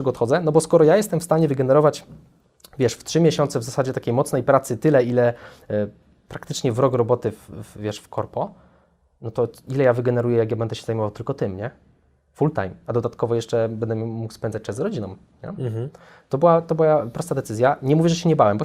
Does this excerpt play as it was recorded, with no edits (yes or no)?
yes